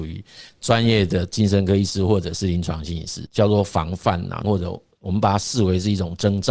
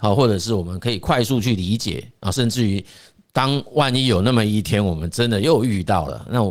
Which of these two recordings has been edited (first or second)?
first